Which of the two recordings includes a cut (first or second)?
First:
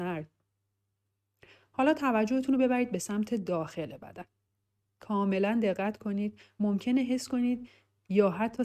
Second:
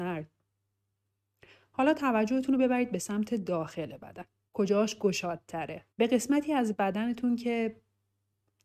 second